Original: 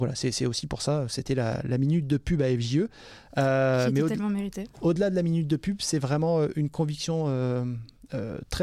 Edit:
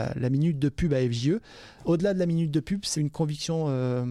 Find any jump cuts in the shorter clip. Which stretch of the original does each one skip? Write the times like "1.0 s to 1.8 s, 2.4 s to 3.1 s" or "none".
3.3 s to 4.7 s, 5.9 s to 6.5 s